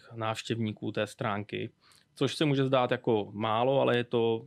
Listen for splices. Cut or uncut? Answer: uncut